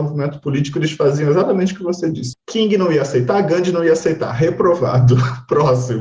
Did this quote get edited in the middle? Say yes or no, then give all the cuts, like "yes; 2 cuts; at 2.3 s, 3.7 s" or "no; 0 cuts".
yes; 1 cut; at 2.3 s